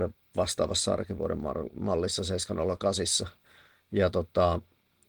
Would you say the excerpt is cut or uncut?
uncut